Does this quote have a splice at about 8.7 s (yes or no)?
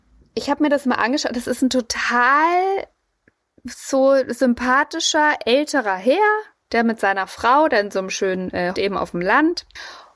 yes